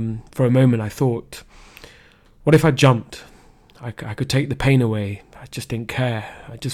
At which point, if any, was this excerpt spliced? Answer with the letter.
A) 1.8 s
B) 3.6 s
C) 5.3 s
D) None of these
D